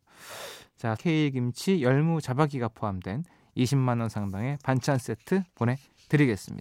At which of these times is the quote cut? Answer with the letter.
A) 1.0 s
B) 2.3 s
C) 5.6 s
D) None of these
A